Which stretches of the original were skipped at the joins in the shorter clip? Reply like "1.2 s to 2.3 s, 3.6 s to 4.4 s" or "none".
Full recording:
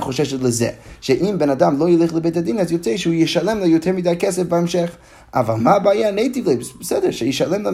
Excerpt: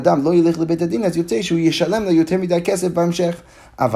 none